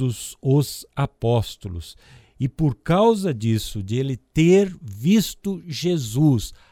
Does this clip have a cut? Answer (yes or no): no